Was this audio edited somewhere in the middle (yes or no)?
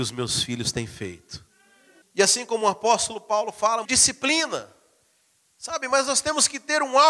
yes